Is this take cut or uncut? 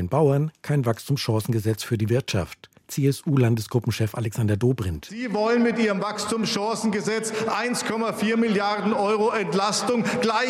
uncut